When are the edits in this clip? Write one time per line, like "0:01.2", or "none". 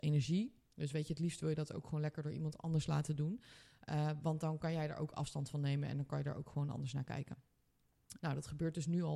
0:08.2

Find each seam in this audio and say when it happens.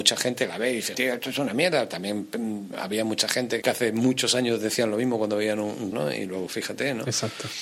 0:00.9
0:03.6
0:05.9

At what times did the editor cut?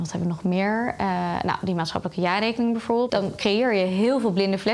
0:03.1

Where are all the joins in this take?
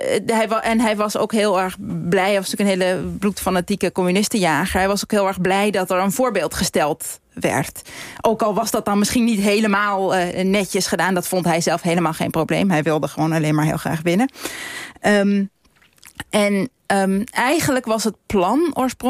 none

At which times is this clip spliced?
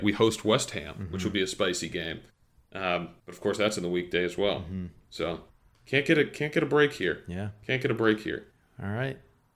none

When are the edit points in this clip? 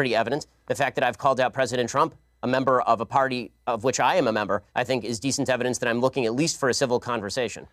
0:04.7

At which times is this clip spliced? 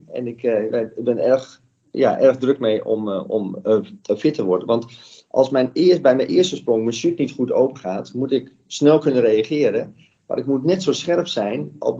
none

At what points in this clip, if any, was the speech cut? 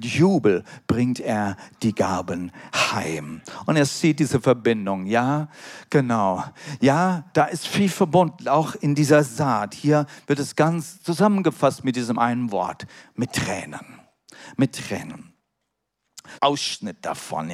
0:07.3
0:16.4

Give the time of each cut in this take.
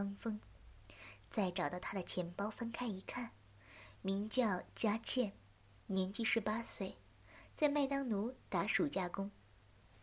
0:04.0

